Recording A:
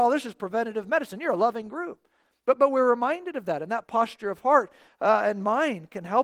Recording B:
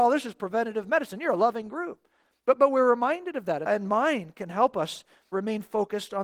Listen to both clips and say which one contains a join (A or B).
B